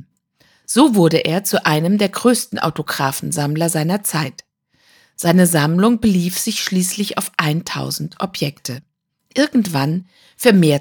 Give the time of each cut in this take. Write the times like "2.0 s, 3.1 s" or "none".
none